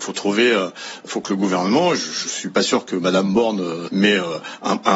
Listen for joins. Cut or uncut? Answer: cut